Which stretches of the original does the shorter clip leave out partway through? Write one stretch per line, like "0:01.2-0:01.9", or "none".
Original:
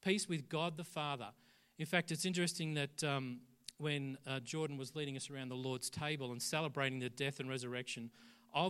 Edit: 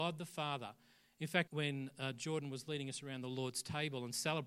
0:02.1-0:03.7